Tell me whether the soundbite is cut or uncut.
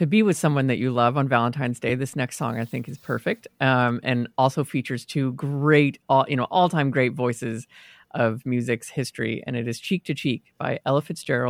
uncut